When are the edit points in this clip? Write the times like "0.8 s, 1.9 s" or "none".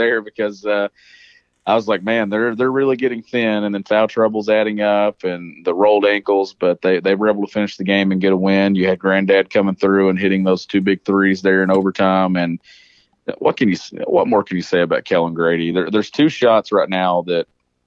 none